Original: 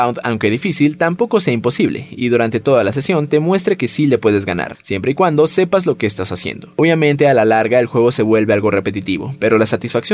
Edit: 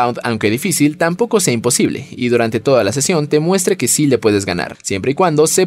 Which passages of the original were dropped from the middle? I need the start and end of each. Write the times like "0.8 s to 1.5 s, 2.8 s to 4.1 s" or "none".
none